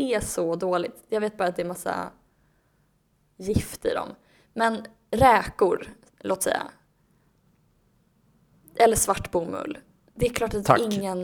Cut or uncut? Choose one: uncut